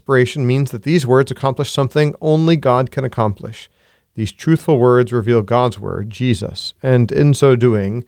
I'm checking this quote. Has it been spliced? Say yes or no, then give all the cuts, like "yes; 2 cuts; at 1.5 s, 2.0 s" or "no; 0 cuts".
no; 0 cuts